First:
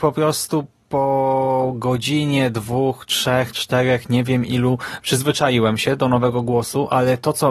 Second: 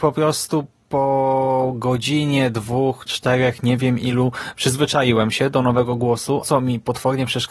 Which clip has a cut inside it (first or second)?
second